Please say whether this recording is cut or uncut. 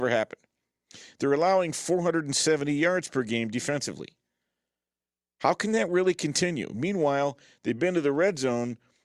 uncut